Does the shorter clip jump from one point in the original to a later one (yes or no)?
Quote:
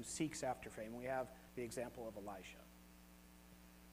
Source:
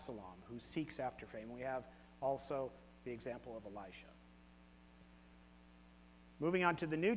yes